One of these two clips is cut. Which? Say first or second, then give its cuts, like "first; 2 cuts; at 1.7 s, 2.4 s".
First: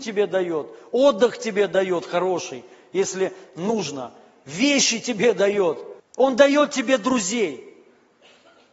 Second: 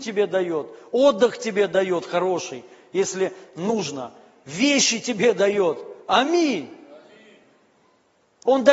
first; 1 cut; at 6.0 s